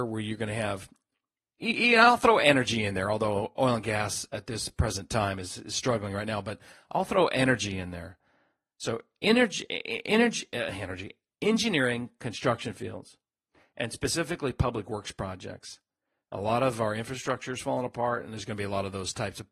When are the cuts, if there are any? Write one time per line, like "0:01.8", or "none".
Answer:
none

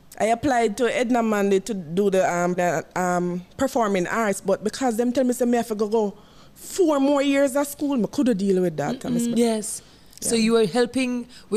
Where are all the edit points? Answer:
0:02.6
0:09.3

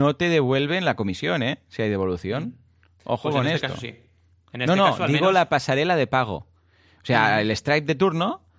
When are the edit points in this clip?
none

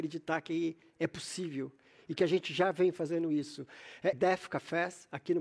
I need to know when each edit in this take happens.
0:04.1

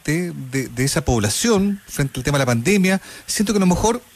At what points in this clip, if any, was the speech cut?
none

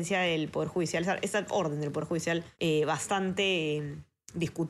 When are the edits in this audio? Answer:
0:02.5

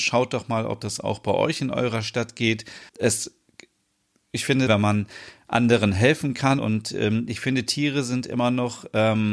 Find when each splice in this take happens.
0:02.9
0:04.7
0:06.6

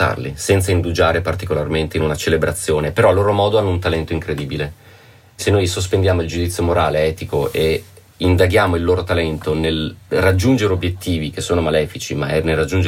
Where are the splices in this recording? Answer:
0:05.4

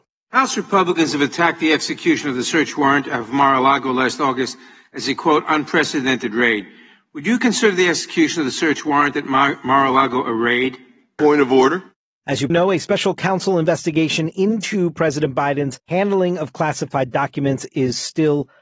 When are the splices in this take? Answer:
0:11.2
0:12.5

